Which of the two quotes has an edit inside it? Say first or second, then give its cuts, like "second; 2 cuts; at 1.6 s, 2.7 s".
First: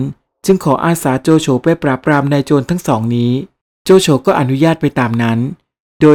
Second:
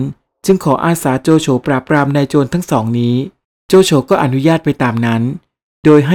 second; 1 cut; at 1.6 s